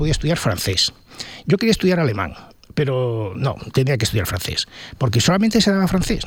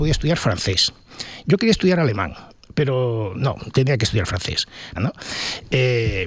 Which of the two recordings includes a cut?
second; 1 cut; at 5.0 s

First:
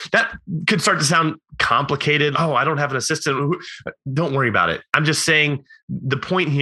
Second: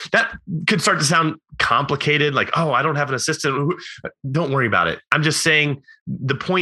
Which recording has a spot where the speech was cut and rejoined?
first; 1 cut; at 2.3 s

